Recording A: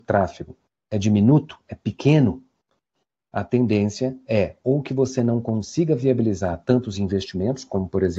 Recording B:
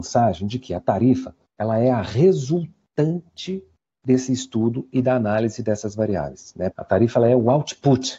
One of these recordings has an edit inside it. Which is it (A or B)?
B